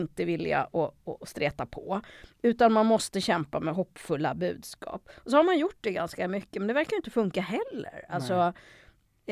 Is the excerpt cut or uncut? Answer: uncut